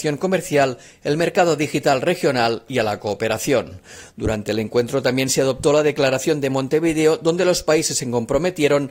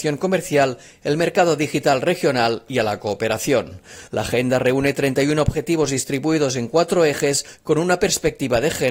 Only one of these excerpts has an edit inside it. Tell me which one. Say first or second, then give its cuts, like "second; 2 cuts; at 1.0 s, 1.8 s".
second; 1 cut; at 4.1 s